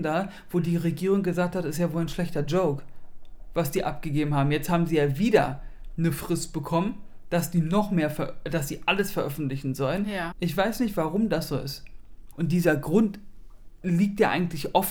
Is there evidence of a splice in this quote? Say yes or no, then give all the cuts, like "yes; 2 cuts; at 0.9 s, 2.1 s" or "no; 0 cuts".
yes; 2 cuts; at 10.3 s, 12.3 s